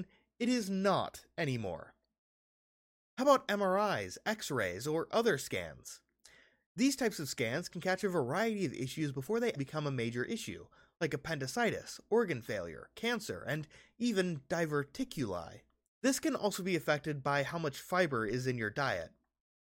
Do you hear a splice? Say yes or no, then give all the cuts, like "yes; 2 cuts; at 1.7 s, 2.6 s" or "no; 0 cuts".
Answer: yes; 2 cuts; at 9.6 s, 15.9 s